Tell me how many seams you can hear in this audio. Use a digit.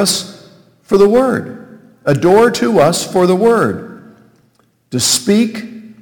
0